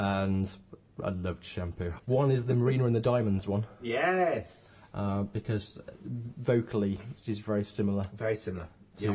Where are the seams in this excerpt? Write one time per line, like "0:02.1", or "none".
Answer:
0:02.0